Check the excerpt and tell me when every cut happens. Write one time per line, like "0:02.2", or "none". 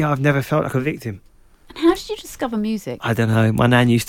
none